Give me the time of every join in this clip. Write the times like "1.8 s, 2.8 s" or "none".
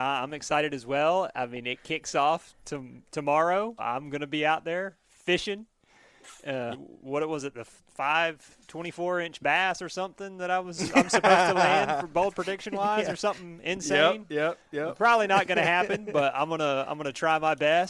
3.8 s, 6.7 s